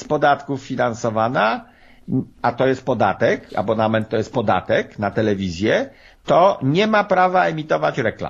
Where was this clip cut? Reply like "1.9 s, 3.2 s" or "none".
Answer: none